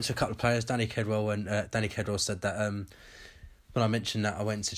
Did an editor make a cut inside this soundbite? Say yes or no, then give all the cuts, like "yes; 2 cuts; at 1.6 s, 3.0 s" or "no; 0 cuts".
no; 0 cuts